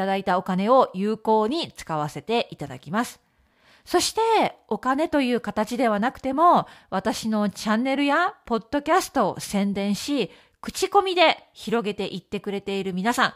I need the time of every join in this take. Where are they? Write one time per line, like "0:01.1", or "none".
none